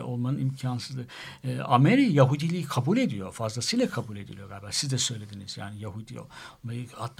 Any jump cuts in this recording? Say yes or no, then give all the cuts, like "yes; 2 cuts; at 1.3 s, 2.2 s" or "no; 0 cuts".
no; 0 cuts